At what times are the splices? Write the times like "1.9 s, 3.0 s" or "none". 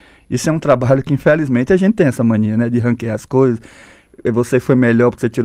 none